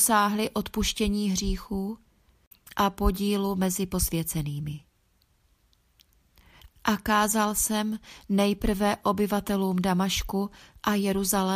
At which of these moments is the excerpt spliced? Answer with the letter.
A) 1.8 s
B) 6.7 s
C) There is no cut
B